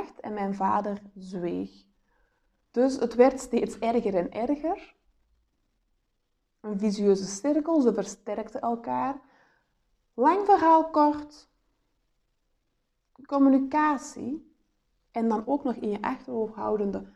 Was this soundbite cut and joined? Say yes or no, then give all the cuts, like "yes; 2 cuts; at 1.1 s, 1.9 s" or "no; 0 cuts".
no; 0 cuts